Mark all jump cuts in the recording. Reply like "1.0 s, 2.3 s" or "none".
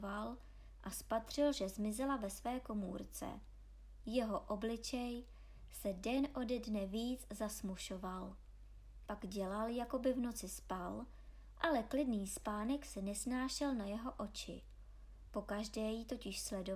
9.1 s, 15.3 s